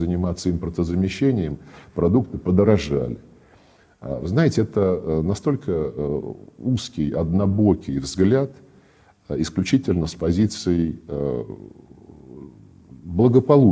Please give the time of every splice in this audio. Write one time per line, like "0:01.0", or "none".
none